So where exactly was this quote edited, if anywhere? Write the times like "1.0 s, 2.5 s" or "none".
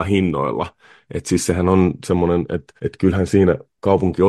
2.8 s

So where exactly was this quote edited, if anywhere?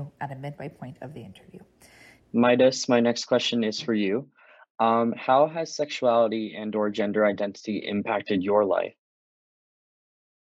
2.2 s

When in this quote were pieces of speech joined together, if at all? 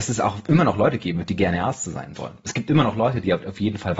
none

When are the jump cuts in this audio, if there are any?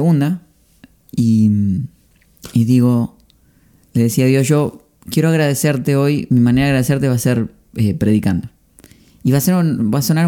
none

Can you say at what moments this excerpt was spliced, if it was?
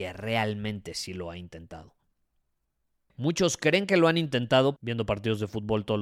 3.1 s, 4.8 s

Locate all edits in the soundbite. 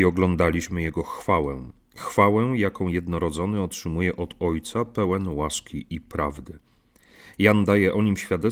none

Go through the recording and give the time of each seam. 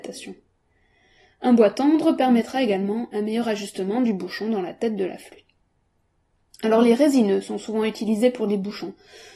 none

